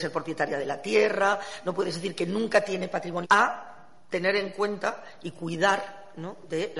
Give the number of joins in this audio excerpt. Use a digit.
1